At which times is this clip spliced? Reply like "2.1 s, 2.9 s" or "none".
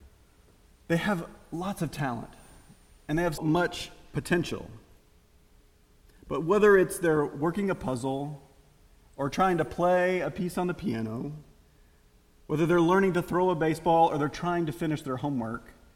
3.4 s